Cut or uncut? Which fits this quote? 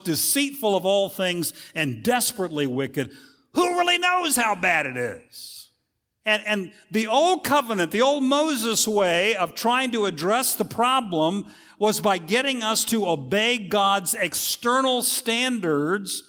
cut